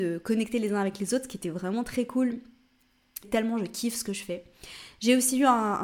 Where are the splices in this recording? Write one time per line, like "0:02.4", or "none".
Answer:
0:03.2